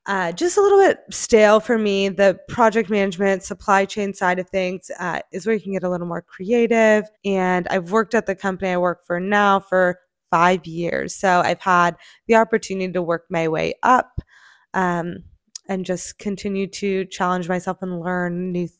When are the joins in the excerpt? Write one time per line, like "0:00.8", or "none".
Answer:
0:07.1